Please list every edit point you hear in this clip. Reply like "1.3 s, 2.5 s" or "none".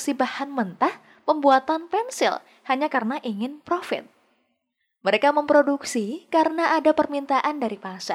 none